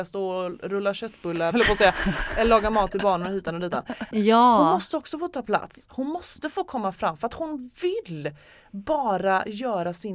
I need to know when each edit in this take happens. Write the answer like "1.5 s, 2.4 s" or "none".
1.5 s, 4.1 s

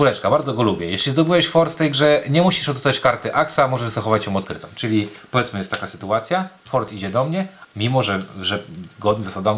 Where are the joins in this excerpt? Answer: 7.6 s

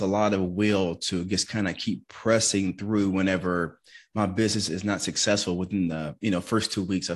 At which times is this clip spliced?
none

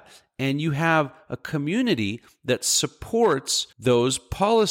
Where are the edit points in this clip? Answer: 3.7 s

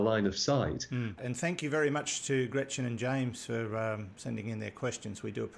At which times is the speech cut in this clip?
1.2 s

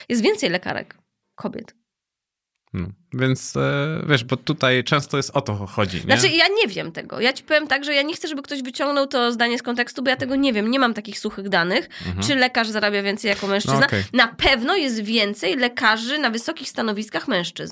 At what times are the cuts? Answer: none

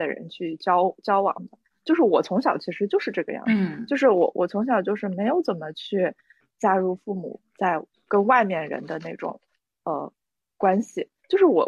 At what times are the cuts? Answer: none

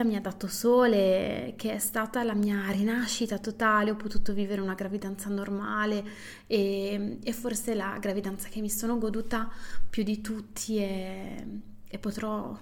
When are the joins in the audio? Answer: none

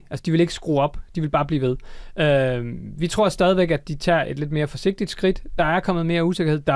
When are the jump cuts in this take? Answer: none

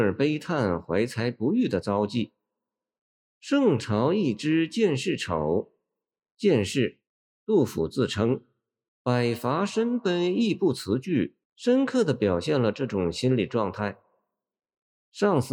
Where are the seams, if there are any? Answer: 8.9 s, 11.4 s

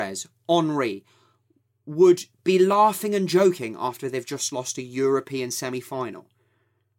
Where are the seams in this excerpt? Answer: none

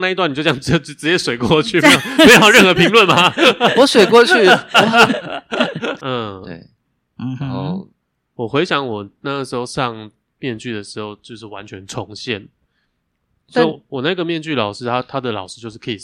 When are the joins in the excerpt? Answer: 6.0 s

